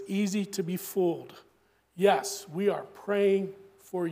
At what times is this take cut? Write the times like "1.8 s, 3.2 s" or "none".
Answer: none